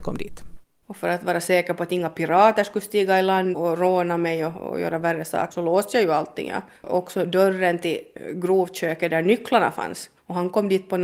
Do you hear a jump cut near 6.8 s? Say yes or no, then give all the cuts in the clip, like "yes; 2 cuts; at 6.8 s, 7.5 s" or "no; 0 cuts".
no; 2 cuts; at 3.5 s, 5.5 s